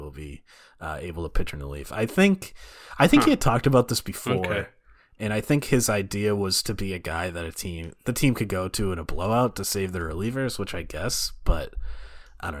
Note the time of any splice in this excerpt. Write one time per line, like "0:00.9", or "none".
0:06.6